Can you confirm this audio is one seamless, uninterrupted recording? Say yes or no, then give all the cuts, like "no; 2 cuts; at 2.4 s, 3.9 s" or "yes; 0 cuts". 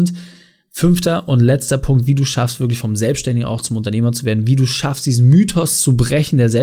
yes; 0 cuts